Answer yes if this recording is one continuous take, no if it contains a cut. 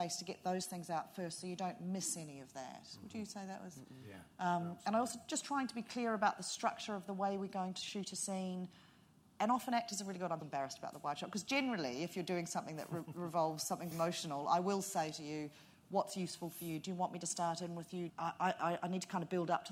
no